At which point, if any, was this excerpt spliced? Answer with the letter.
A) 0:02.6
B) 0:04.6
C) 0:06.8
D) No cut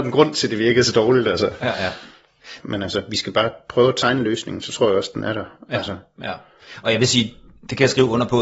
A